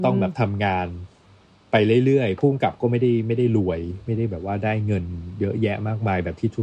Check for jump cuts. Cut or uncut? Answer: uncut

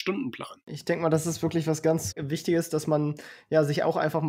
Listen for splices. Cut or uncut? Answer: cut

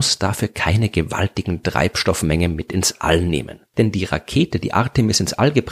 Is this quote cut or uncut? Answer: cut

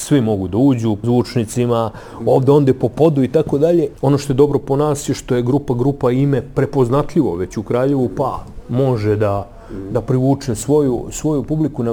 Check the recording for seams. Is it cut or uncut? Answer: cut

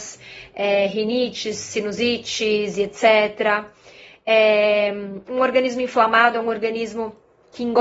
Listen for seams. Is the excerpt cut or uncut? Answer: uncut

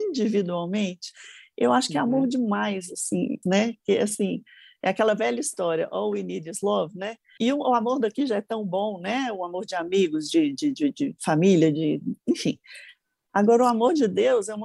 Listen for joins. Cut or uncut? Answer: cut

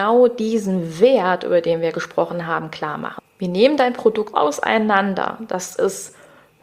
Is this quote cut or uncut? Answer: cut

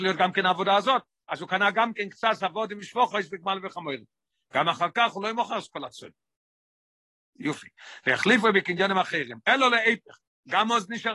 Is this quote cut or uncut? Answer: cut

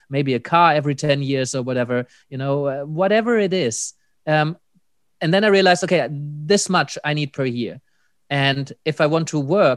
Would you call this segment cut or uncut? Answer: uncut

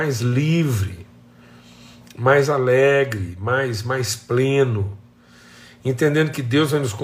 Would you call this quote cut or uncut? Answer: uncut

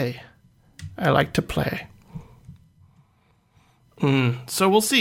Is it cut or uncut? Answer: uncut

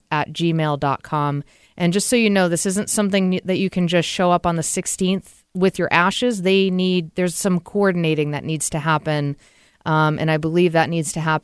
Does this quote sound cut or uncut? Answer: uncut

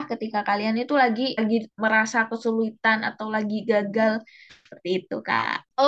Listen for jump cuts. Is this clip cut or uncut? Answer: cut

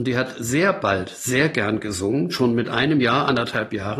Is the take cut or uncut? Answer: uncut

